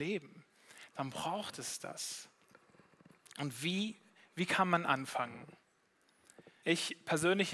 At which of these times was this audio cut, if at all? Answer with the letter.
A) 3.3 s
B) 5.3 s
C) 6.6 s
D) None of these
C